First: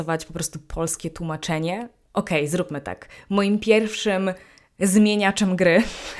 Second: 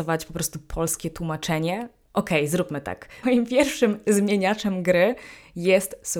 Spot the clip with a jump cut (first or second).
second